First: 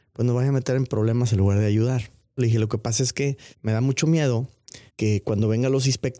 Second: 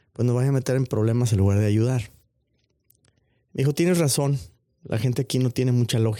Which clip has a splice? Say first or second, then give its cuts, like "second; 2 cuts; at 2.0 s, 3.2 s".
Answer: first; 3 cuts; at 2.4 s, 3.5 s, 4.9 s